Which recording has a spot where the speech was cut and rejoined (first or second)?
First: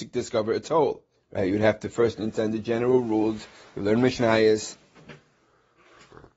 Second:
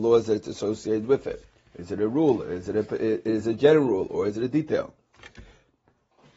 first